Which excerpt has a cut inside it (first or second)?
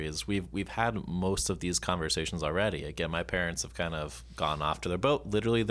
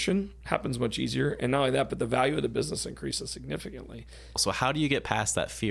second